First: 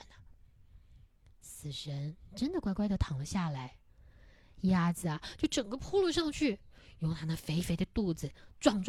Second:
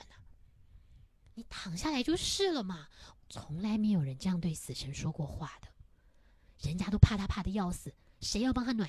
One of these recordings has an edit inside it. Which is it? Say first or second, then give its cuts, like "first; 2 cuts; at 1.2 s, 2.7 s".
second; 2 cuts; at 1.3 s, 3.1 s